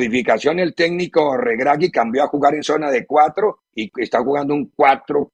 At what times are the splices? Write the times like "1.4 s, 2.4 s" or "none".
3.7 s